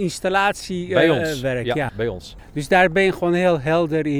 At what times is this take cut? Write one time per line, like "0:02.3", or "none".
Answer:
0:01.9